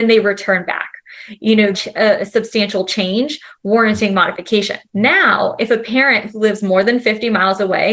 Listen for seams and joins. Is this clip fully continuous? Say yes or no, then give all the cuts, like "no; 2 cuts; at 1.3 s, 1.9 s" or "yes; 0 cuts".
no; 2 cuts; at 1.7 s, 4.9 s